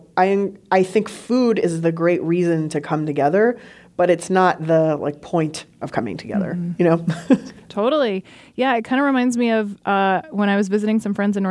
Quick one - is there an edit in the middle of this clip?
no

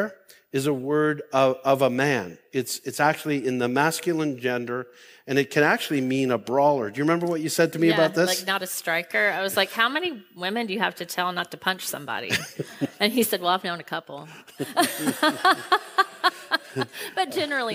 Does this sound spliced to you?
no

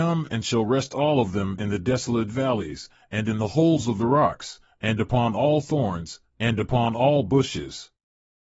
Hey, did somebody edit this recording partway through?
no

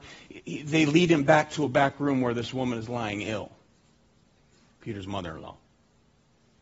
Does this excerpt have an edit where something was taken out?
no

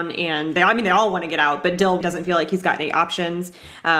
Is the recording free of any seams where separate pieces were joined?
no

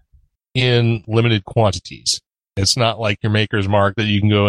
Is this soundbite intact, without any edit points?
yes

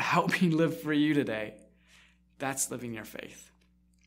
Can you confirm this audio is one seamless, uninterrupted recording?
yes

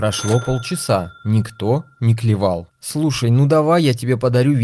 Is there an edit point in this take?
no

